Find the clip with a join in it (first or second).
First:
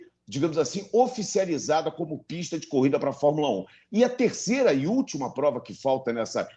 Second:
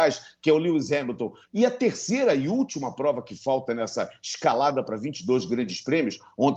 second